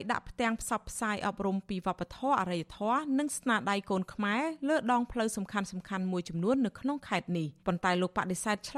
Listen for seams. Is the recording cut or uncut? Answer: cut